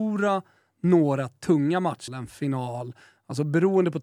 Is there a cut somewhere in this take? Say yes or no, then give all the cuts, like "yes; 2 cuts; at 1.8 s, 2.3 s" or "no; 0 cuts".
yes; 1 cut; at 2.1 s